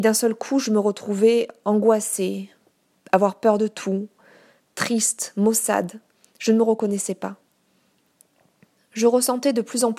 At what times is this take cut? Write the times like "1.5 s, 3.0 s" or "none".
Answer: none